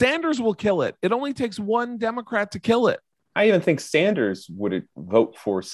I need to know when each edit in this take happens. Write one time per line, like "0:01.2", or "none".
0:03.3